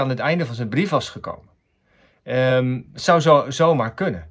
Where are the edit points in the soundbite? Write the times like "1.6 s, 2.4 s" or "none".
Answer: none